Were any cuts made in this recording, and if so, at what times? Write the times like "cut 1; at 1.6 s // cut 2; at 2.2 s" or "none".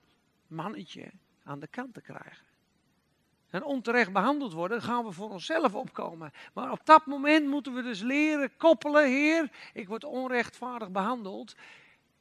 none